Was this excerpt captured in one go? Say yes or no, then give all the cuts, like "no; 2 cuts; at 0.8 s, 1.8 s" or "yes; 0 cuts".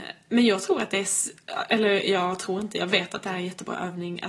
yes; 0 cuts